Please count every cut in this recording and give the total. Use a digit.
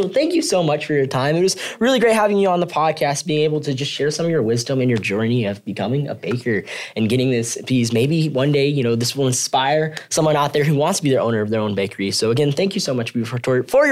0